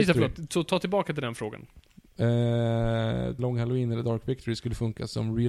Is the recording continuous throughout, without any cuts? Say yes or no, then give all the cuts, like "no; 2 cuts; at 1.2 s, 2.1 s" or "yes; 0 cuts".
no; 1 cut; at 3.4 s